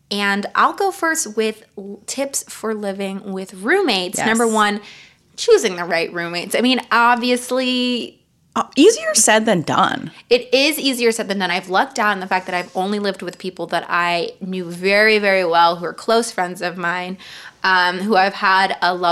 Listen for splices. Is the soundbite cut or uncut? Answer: uncut